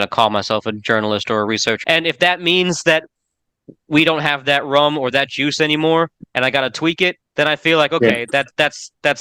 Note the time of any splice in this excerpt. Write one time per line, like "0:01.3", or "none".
0:01.8
0:07.3

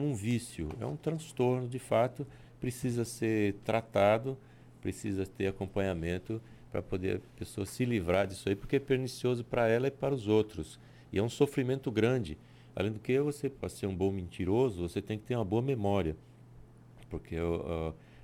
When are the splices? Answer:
none

